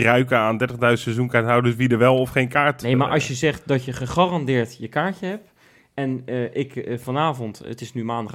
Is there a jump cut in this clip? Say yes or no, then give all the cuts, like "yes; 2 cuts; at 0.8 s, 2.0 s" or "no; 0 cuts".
no; 0 cuts